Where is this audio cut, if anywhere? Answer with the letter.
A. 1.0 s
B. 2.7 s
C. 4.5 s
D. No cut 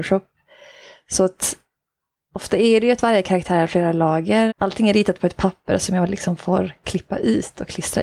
C